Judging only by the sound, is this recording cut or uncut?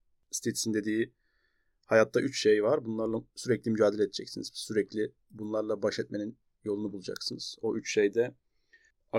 uncut